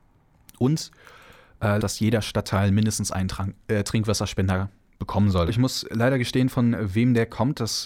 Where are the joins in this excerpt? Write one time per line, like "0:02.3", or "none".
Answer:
0:01.8
0:05.5